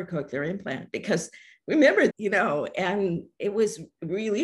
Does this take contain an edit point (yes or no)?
yes